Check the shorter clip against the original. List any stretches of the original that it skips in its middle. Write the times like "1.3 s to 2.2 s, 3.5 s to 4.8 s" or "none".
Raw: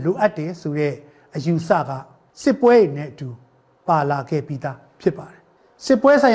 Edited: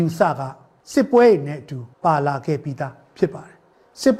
3.4 s to 3.8 s